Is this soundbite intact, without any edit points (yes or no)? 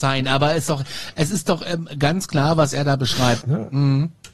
no